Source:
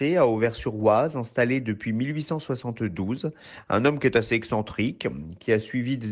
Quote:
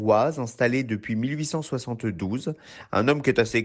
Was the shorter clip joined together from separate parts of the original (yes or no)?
no